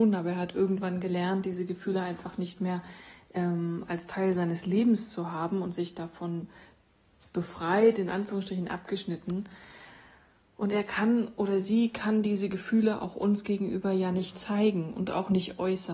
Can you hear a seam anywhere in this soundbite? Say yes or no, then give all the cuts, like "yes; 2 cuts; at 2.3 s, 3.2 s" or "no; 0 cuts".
no; 0 cuts